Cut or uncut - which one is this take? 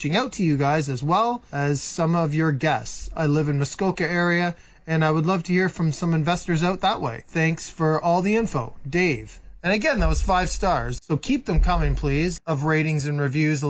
cut